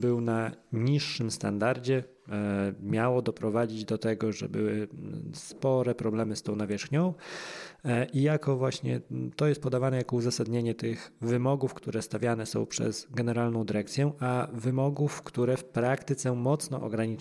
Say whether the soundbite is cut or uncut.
uncut